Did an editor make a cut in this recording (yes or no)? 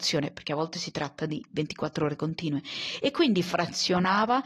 no